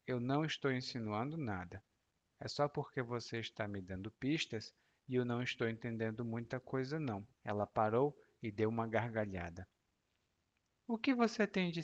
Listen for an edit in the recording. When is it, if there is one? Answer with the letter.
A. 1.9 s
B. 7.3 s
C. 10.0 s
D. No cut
B